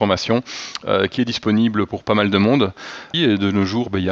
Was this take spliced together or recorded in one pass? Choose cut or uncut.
cut